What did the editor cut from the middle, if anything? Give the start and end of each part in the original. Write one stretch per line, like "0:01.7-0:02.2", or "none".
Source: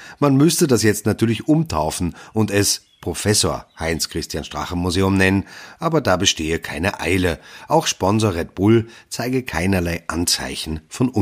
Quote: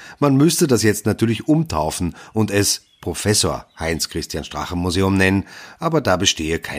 none